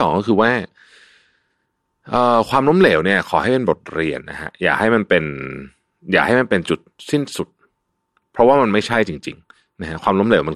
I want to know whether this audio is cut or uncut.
cut